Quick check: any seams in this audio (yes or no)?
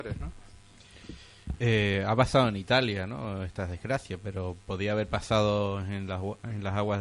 no